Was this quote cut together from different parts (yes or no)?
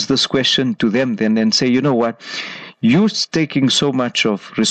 no